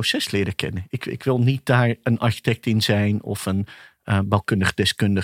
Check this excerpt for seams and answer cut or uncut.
uncut